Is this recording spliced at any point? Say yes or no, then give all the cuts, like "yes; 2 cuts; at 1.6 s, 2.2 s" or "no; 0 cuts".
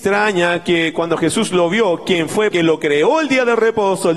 yes; 1 cut; at 2.5 s